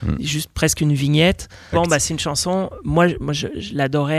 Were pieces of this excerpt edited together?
yes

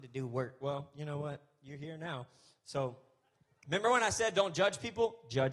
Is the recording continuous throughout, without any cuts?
yes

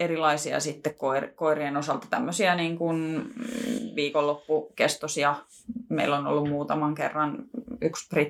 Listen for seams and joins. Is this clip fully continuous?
yes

